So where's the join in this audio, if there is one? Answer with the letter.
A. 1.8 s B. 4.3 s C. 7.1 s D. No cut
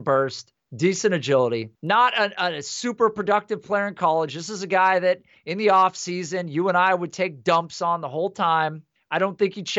A